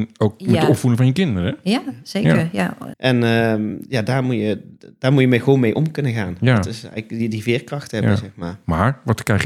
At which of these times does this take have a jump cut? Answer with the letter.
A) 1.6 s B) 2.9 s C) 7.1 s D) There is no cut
B